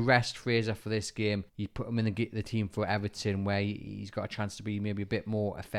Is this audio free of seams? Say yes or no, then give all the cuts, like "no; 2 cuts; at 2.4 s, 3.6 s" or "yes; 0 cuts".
no; 1 cut; at 1.5 s